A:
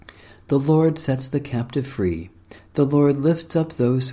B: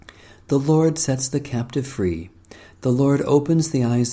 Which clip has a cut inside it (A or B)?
A